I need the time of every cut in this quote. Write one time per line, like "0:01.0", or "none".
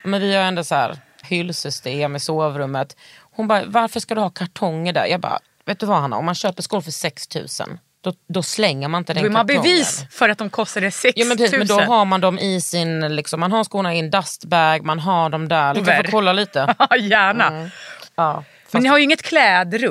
0:01.2
0:15.7
0:18.1